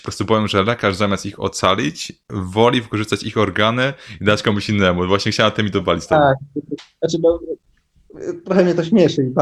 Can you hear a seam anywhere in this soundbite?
no; 0 cuts

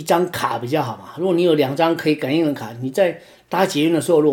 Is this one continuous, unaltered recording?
yes; 0 cuts

